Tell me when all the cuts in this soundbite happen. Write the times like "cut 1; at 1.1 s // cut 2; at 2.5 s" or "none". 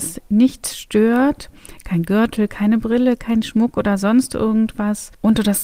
none